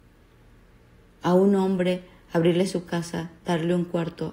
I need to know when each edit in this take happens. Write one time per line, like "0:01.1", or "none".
none

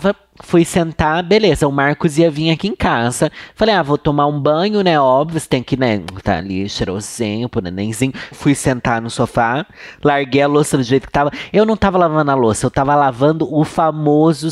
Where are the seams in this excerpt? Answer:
0:08.3

